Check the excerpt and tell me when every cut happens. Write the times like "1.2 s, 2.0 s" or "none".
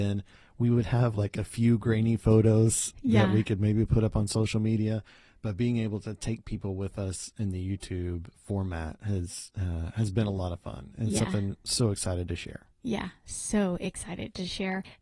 none